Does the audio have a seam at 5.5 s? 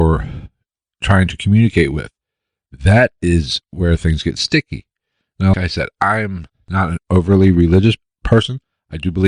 yes; 2 cuts; at 5.5 s, 7.0 s

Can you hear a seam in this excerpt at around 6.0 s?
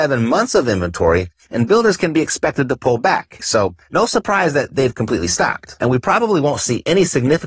no; 1 cut; at 3.4 s

